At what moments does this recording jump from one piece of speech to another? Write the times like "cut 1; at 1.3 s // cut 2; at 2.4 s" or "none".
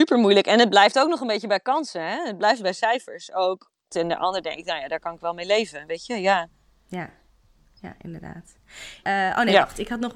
cut 1; at 3.9 s // cut 2; at 9.0 s